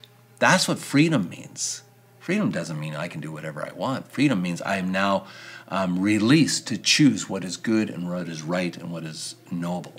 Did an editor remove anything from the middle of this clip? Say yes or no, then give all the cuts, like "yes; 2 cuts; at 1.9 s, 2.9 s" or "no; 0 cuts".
no; 0 cuts